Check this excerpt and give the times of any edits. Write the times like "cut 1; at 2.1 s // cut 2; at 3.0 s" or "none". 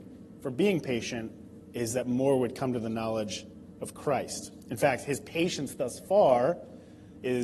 cut 1; at 4.6 s